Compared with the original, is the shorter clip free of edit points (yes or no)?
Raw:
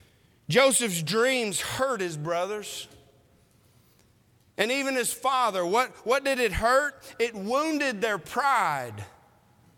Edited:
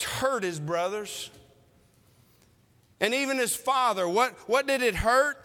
yes